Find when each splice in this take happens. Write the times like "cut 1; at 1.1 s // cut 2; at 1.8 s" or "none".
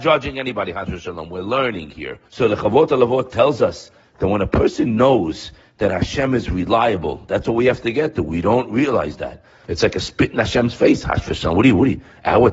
cut 1; at 2.3 s // cut 2; at 9.6 s